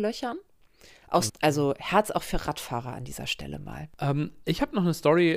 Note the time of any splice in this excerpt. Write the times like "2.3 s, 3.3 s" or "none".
1.3 s